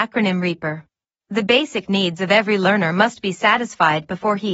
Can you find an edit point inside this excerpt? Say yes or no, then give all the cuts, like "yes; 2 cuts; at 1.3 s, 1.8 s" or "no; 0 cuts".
yes; 1 cut; at 1.1 s